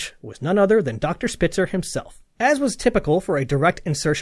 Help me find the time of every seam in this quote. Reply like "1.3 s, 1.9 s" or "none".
2.3 s